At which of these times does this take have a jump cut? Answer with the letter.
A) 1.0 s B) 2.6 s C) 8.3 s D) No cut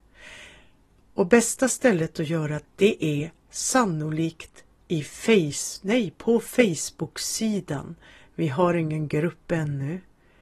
B